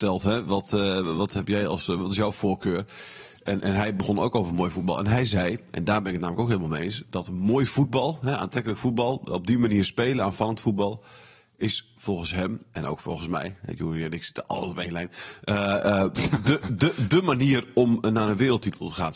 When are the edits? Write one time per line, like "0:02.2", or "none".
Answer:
none